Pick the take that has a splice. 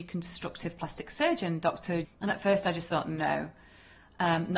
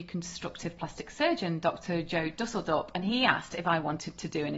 first; 1 cut; at 2.0 s

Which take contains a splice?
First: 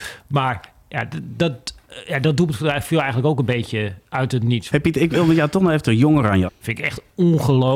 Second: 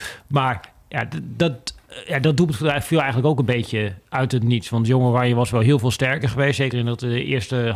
first; 2 cuts; at 4.7 s, 6.5 s

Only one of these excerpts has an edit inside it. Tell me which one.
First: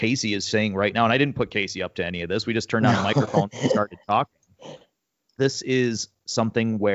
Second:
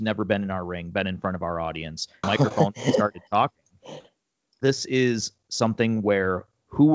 second; 1 cut; at 2.2 s

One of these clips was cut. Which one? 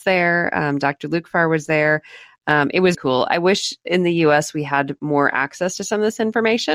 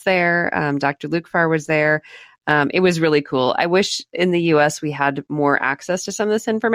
first; 1 cut; at 2.9 s

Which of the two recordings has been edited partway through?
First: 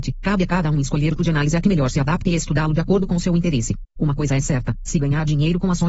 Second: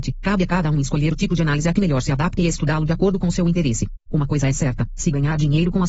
first; 1 cut; at 1.2 s

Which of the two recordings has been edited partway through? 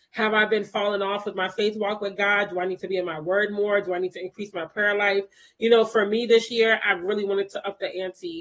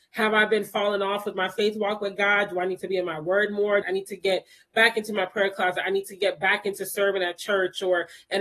second; 1 cut; at 3.8 s

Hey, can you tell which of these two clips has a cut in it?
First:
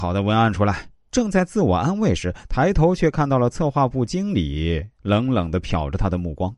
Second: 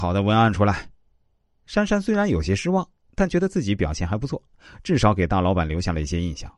first; 1 cut; at 1.1 s

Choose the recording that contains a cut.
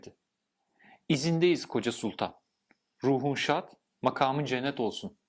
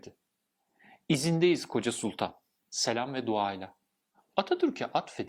second; 1 cut; at 2.6 s

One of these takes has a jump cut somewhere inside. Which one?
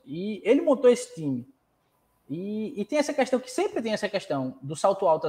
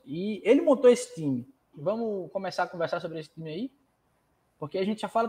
second; 1 cut; at 1.7 s

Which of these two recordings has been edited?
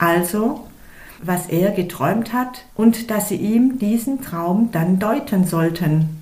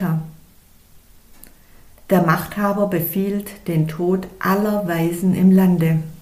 first; 2 cuts; at 1.2 s, 2.7 s

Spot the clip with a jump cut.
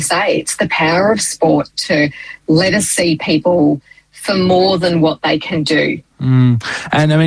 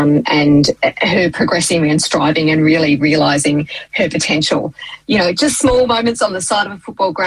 first; 1 cut; at 6.1 s

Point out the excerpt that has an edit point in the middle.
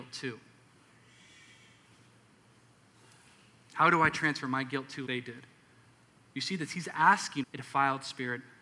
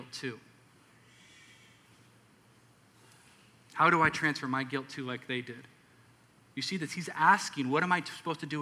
first; 2 cuts; at 5.1 s, 7.4 s

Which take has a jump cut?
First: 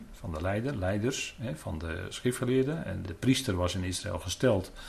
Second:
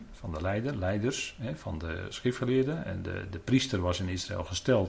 first; 1 cut; at 3.0 s

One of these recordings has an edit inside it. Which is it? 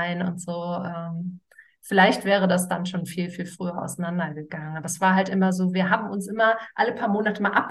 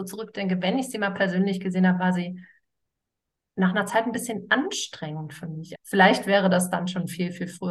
second; 1 cut; at 5.8 s

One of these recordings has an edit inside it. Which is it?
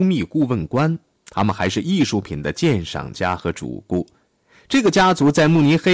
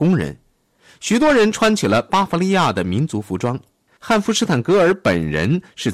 second; 1 cut; at 4.0 s

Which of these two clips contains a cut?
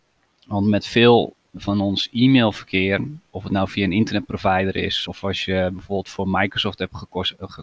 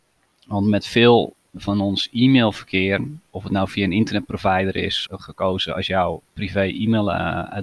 second; 2 cuts; at 5.1 s, 6.3 s

